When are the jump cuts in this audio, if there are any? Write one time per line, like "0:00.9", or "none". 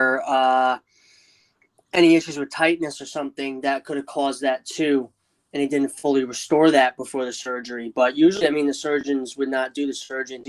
none